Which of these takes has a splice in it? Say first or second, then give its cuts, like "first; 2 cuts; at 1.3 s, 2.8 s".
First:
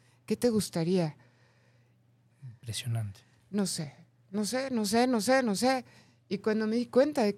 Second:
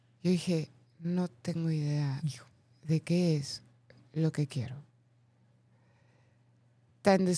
first; 1 cut; at 2.3 s